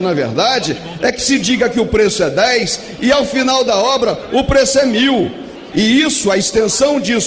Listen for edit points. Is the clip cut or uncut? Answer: cut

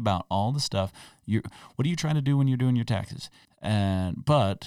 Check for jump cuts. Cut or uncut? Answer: cut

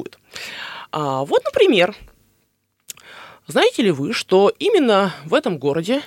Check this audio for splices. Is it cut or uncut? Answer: uncut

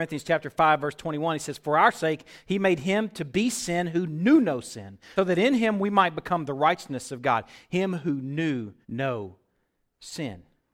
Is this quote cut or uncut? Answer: cut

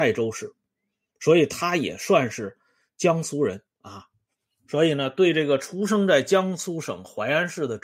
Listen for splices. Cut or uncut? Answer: cut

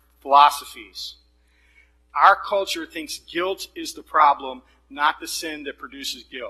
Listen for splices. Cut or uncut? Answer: uncut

